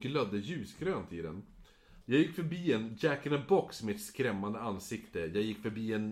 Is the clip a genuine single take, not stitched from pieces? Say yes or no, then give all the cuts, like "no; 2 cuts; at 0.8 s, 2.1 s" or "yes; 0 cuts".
no; 1 cut; at 2.0 s